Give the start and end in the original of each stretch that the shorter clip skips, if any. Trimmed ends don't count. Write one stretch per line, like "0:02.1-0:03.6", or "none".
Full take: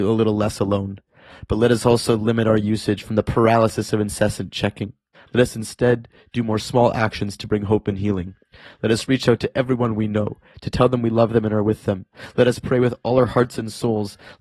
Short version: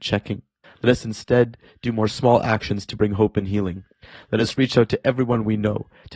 none